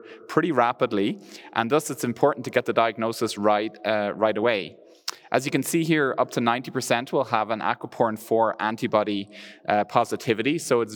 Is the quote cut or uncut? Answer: uncut